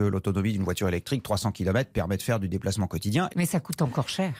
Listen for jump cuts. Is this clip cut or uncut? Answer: cut